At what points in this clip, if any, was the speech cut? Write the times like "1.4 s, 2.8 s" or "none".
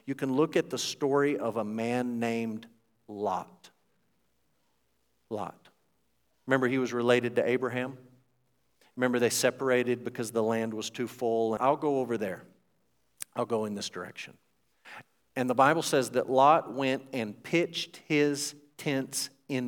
11.6 s